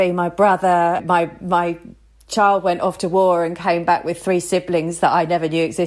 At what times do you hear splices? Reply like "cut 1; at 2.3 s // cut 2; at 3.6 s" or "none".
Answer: cut 1; at 1.0 s